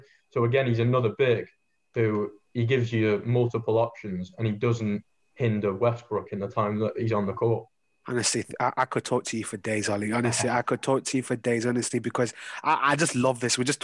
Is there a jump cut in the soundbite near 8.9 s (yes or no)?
no